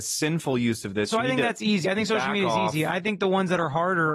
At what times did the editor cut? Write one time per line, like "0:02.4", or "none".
none

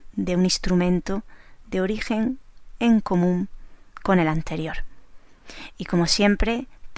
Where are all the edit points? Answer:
0:05.7

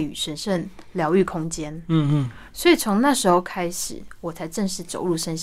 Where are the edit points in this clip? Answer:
0:02.5

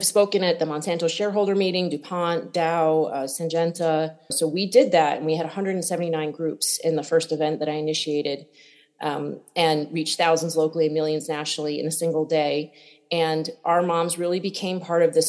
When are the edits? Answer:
0:04.3

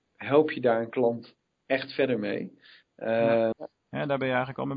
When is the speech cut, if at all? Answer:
0:03.5

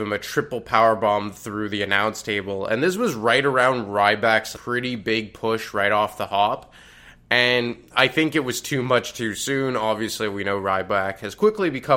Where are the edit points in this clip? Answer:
0:04.5

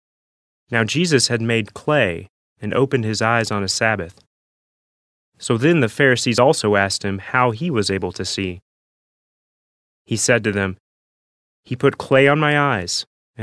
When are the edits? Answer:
none

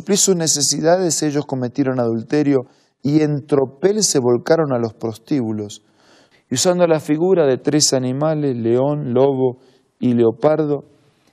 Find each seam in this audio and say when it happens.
0:06.3

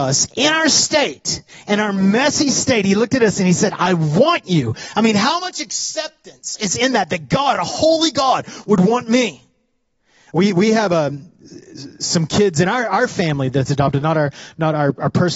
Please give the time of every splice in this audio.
none

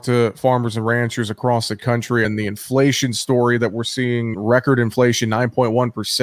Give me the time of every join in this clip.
0:02.2
0:04.3

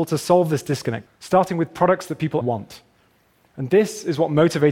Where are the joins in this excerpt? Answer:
0:01.1
0:02.4

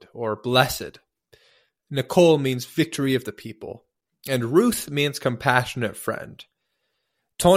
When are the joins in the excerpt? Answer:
none

